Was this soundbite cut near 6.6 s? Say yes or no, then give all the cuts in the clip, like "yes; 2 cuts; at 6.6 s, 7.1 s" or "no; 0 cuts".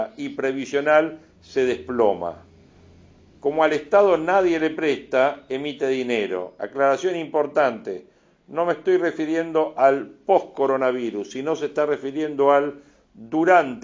yes; 1 cut; at 6.6 s